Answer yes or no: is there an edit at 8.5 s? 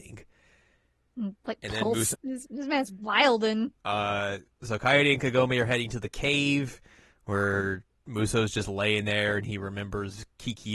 no